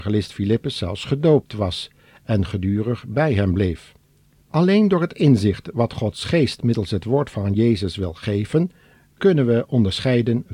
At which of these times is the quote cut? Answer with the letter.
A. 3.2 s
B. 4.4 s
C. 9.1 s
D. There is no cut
B